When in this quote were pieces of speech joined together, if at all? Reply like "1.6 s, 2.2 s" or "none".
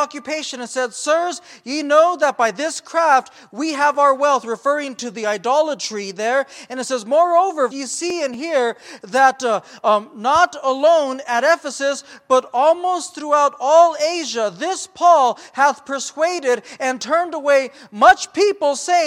7.7 s